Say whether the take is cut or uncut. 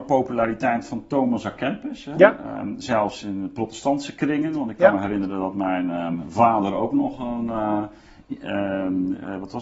uncut